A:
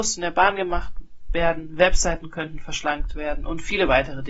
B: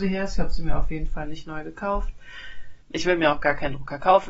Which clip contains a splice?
B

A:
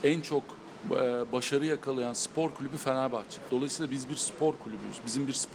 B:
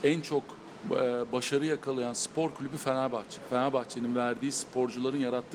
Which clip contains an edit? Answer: A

